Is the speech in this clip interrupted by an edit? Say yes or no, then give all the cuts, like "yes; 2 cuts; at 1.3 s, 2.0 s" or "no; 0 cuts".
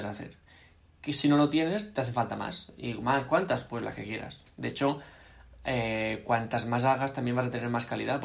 no; 0 cuts